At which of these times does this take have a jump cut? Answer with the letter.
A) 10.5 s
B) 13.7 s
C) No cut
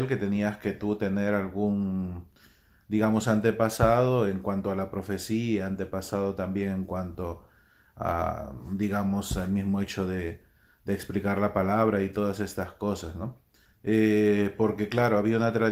B